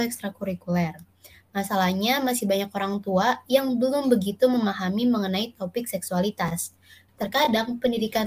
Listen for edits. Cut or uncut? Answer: cut